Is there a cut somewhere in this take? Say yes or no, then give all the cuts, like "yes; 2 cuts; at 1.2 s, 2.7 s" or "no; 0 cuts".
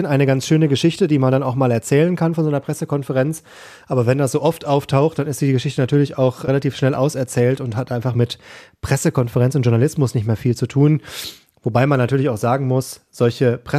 no; 0 cuts